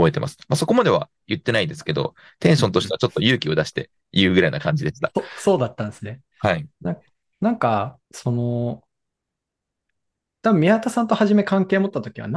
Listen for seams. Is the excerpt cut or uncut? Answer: cut